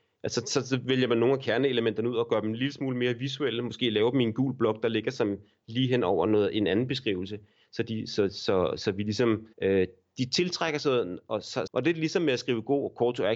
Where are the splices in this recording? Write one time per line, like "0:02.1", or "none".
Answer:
0:09.5
0:11.7